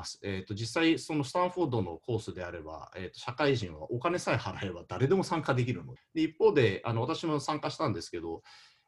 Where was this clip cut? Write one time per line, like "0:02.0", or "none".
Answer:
0:06.0